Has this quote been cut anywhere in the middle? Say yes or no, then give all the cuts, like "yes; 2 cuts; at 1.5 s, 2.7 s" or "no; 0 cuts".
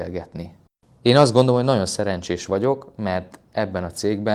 no; 0 cuts